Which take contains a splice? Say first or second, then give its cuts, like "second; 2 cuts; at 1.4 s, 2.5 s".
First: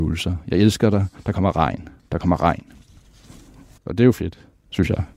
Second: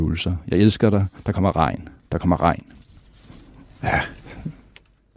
first; 1 cut; at 3.8 s